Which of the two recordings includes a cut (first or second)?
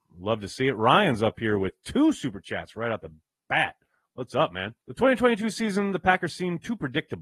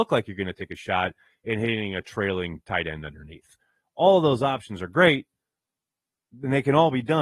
first